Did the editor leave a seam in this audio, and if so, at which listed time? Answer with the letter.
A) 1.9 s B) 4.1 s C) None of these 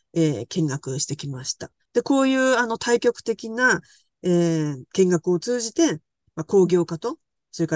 A